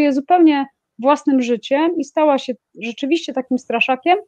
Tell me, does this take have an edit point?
no; 0 cuts

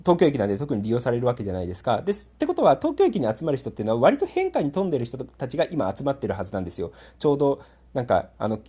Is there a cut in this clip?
no; 0 cuts

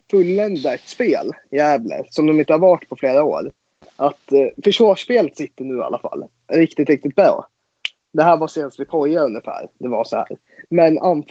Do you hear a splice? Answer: no; 0 cuts

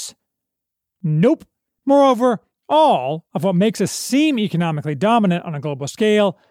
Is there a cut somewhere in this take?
yes; 2 cuts; at 1.8 s, 3.3 s

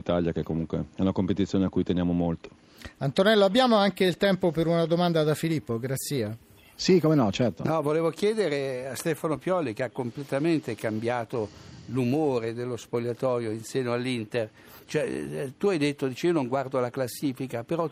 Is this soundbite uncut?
yes; 0 cuts

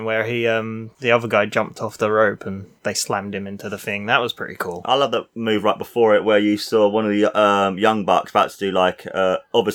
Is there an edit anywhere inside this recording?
no; 0 cuts

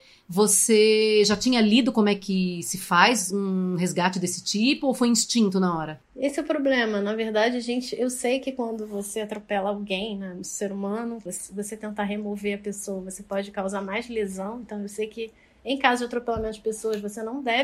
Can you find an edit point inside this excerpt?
no; 0 cuts

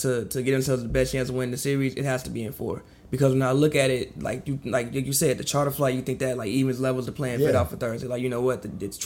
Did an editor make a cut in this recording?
no; 0 cuts

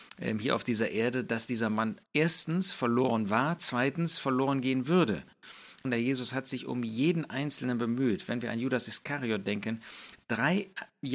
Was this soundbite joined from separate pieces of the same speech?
yes; 2 cuts; at 2.1 s, 5.8 s

